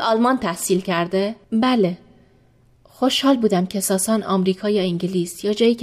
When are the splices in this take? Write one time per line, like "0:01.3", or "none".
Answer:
0:01.4